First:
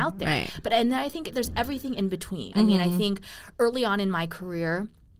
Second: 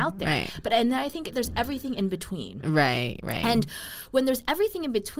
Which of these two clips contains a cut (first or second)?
first